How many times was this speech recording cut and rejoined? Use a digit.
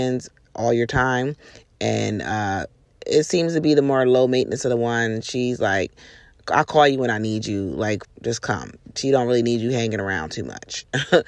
2